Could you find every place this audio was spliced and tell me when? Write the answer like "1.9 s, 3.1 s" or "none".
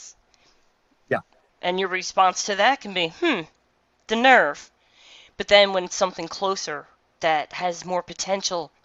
1.5 s

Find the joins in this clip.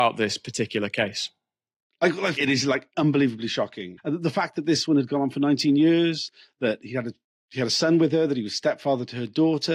2.4 s, 4.0 s

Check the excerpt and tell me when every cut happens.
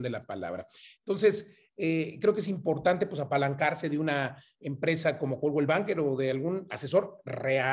1.0 s

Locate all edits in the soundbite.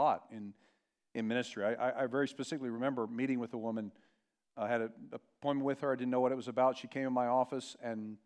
none

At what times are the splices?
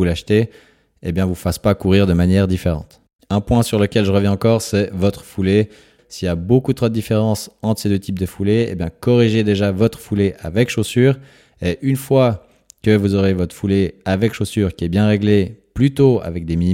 6.0 s

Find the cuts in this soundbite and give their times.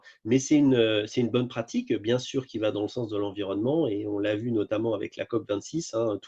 none

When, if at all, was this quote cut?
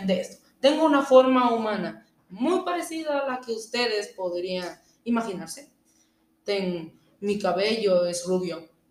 none

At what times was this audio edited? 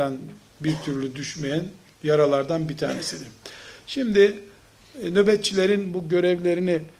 none

